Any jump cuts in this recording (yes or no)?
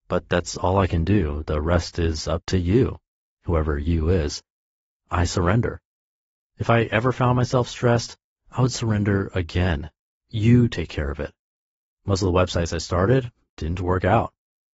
no